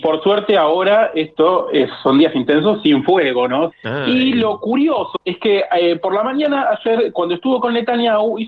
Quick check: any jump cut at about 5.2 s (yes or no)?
yes